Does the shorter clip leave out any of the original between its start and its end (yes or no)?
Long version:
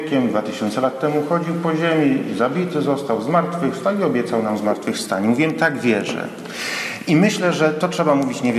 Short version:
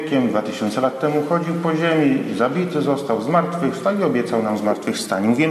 no